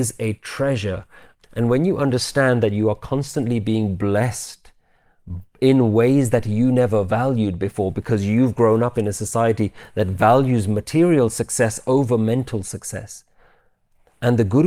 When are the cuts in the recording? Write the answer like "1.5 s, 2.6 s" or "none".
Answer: 1.3 s